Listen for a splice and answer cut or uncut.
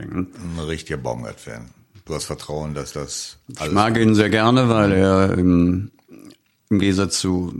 uncut